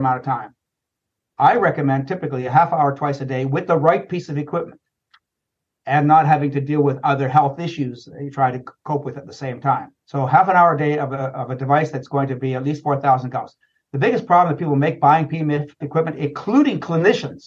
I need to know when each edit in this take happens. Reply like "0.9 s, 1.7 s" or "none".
10.0 s, 15.8 s